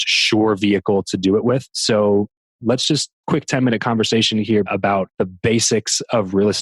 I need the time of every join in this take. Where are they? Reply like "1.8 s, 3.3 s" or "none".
3.2 s, 4.7 s